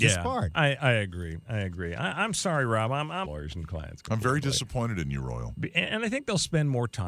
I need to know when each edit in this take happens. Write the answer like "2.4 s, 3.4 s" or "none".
3.2 s